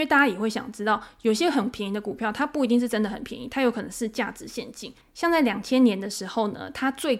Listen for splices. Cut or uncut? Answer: cut